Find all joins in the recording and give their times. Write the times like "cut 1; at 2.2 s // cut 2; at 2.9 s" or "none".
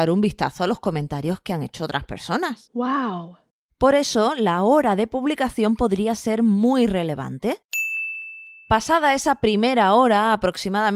none